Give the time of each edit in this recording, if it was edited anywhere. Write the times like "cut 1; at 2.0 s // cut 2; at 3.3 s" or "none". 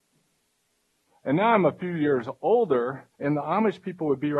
cut 1; at 1.1 s // cut 2; at 3.2 s